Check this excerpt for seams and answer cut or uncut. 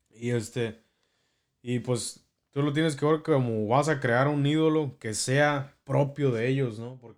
uncut